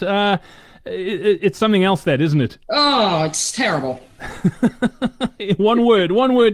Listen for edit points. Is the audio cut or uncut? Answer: cut